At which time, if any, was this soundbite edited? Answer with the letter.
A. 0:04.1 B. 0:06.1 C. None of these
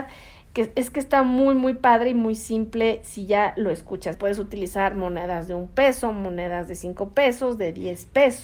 A